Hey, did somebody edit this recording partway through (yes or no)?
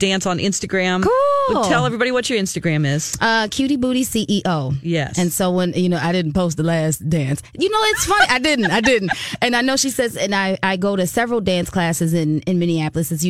no